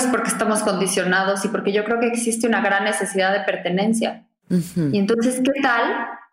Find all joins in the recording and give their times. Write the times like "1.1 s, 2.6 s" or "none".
none